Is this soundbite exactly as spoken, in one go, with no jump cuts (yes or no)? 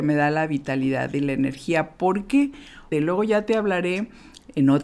no